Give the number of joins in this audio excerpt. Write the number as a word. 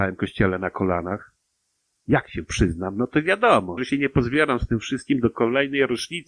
two